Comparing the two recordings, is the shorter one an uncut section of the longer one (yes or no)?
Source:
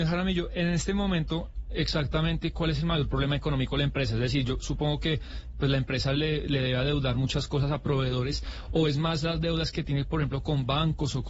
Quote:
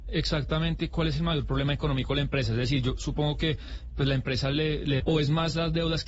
no